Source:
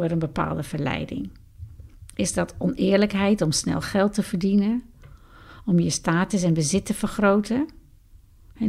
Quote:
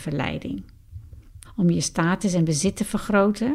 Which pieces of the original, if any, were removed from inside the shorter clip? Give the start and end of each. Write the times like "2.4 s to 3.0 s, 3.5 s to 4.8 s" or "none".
2.1 s to 5.5 s